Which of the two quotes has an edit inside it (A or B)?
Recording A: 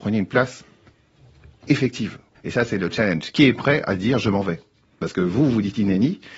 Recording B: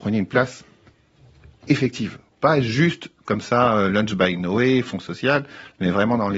A